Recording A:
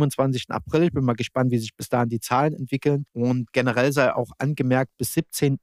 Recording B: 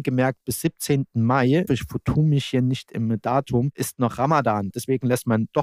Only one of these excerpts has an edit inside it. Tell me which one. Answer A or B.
B